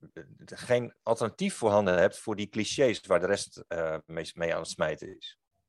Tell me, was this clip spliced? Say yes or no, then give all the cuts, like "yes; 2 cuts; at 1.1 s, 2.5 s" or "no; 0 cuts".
no; 0 cuts